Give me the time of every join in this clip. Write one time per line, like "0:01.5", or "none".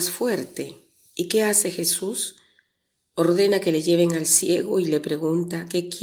none